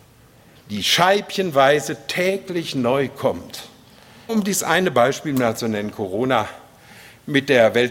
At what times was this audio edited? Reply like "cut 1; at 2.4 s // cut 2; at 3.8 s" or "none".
cut 1; at 4.3 s